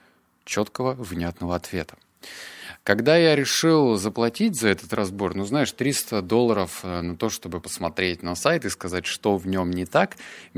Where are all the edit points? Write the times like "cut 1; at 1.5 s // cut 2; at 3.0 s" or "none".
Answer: cut 1; at 7.6 s

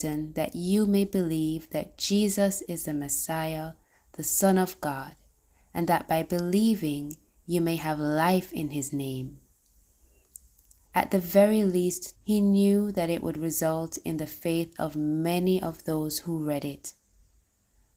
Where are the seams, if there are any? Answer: cut 1; at 10.9 s // cut 2; at 12.1 s

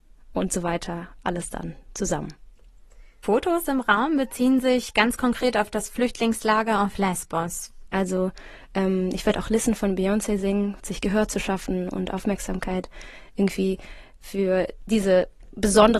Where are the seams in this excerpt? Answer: cut 1; at 7.9 s // cut 2; at 10.8 s

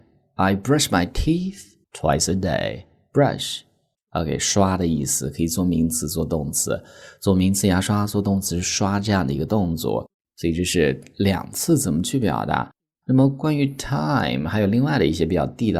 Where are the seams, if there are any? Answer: cut 1; at 1.8 s

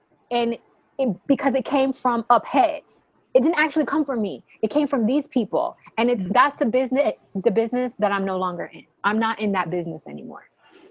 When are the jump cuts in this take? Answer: cut 1; at 6.3 s

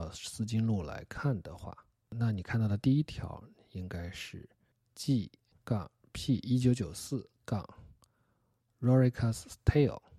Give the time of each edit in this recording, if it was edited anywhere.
none

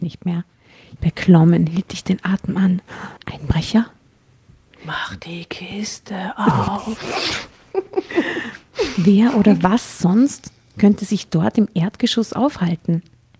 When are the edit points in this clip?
cut 1; at 1.0 s // cut 2; at 3.2 s

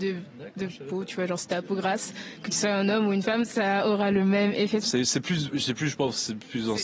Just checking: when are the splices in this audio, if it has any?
cut 1; at 4.8 s

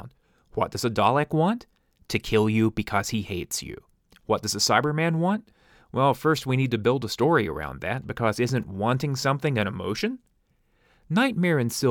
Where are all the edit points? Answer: none

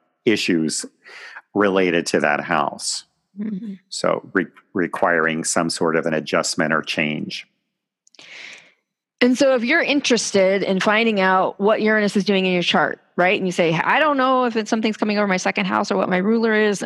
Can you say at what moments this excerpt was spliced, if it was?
none

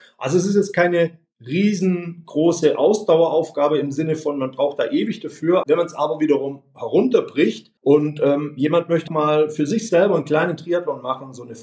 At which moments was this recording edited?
cut 1; at 5.6 s // cut 2; at 7.8 s // cut 3; at 9.1 s

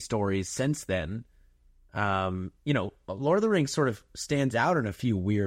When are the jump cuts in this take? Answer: none

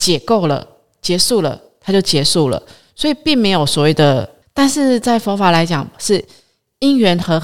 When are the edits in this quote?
cut 1; at 4.4 s // cut 2; at 5.9 s

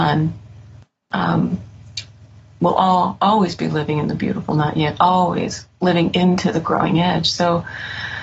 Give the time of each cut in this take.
none

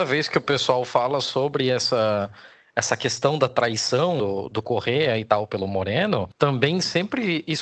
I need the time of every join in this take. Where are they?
cut 1; at 6.3 s

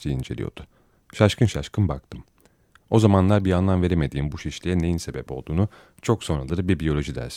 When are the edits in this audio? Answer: none

